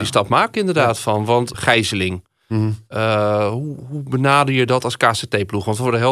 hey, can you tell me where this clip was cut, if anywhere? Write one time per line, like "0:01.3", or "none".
0:01.5